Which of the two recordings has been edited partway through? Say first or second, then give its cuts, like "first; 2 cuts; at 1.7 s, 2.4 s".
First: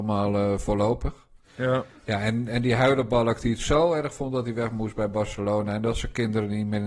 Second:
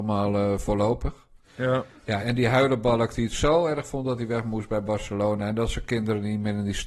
second; 1 cut; at 2.2 s